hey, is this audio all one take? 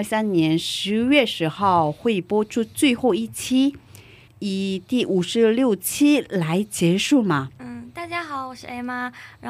no; 2 cuts; at 4.3 s, 7.6 s

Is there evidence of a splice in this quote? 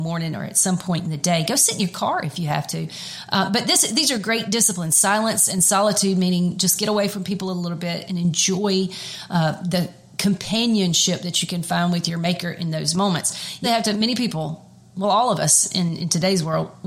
yes; 2 cuts; at 8.1 s, 13.6 s

